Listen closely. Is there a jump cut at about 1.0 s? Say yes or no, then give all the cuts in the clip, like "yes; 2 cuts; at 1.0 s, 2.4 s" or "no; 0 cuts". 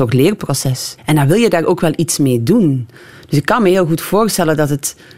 yes; 1 cut; at 1.0 s